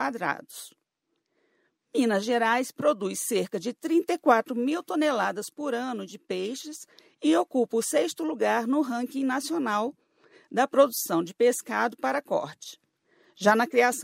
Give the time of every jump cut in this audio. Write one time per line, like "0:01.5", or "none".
none